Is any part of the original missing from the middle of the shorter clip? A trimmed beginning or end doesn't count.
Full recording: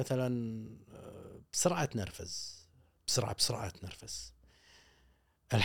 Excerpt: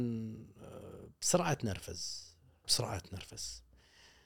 yes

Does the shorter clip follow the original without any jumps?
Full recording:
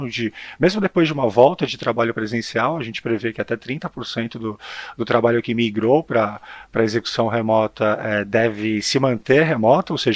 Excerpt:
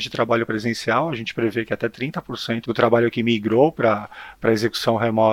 no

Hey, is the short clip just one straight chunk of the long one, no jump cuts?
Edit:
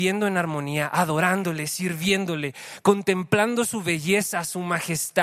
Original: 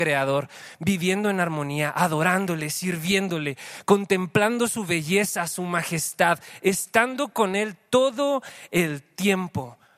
yes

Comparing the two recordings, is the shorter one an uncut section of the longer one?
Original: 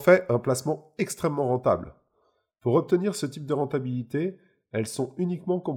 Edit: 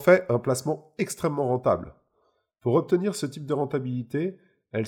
yes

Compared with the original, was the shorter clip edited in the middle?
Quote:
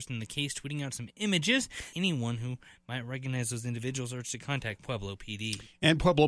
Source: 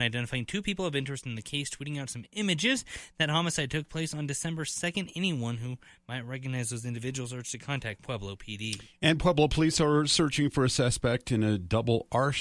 yes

